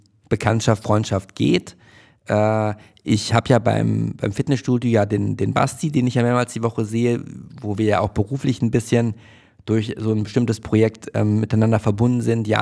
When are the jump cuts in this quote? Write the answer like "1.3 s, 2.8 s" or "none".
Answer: none